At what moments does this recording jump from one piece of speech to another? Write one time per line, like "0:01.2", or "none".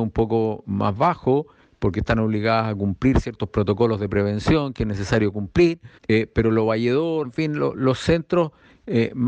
0:06.0
0:07.2